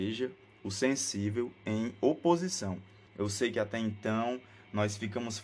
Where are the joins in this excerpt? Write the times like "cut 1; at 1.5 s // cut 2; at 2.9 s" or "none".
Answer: cut 1; at 3.1 s